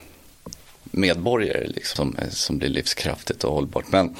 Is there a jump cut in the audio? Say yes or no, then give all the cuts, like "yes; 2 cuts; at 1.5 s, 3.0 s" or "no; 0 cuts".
yes; 1 cut; at 2.0 s